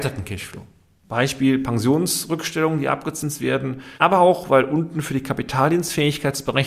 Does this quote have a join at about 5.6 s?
no; 2 cuts; at 1.0 s, 4.0 s

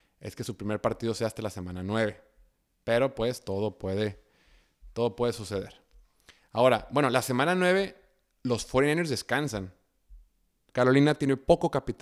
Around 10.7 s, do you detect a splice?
yes; 1 cut; at 10.7 s

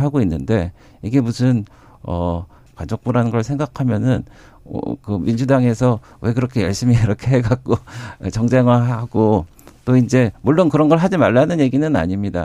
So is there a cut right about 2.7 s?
yes; 1 cut; at 2.7 s

